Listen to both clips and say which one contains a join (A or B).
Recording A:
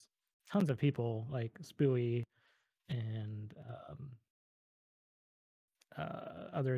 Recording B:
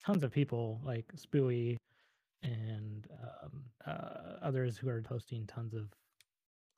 B